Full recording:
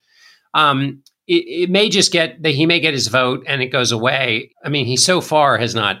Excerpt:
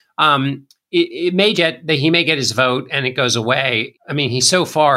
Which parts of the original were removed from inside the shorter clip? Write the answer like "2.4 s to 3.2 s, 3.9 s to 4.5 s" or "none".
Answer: 1.9 s to 2.1 s